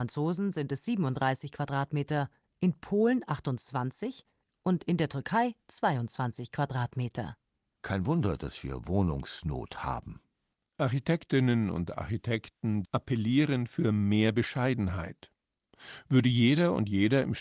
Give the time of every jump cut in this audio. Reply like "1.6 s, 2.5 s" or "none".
12.8 s